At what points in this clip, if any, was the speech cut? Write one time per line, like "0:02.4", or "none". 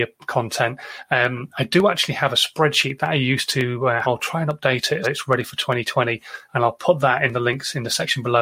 0:04.0
0:05.0

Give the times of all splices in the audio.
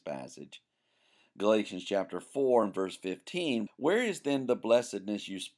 0:03.7

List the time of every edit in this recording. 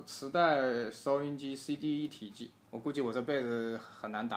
0:02.6

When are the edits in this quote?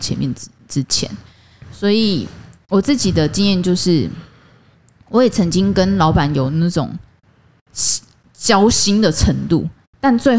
none

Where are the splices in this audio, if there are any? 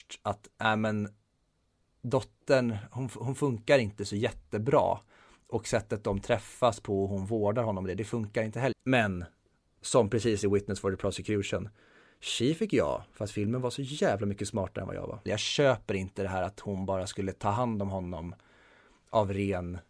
0:08.7
0:15.3

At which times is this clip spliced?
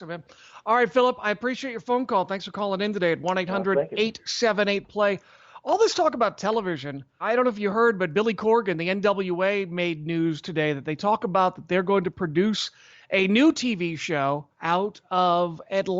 0:07.2
0:14.5

